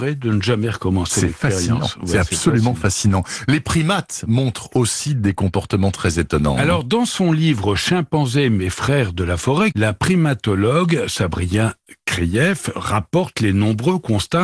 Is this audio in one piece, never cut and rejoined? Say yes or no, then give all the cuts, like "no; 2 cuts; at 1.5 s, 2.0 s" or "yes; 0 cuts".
no; 1 cut; at 9.7 s